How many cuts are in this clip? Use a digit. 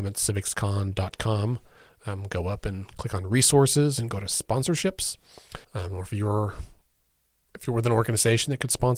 1